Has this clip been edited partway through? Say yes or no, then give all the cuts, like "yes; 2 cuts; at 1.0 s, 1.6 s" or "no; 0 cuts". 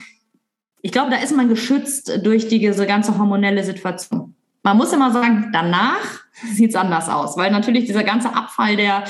no; 0 cuts